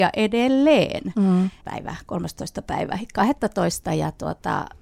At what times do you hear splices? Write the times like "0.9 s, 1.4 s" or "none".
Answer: 1.6 s